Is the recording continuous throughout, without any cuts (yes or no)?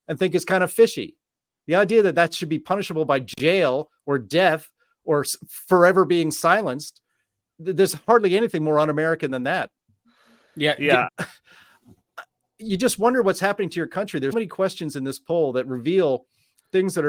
no